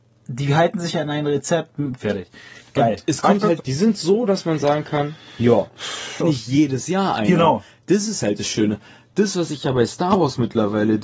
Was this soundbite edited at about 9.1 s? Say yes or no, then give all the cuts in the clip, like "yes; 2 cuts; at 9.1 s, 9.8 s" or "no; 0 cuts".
no; 3 cuts; at 2.0 s, 3.6 s, 6.2 s